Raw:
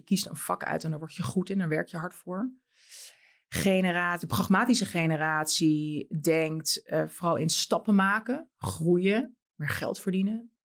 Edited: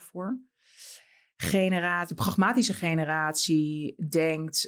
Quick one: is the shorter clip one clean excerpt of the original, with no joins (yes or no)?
yes